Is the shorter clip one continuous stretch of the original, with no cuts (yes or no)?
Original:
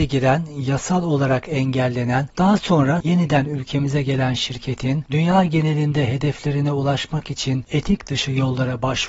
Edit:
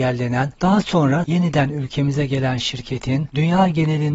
yes